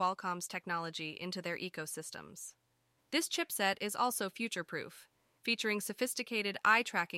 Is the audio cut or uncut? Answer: cut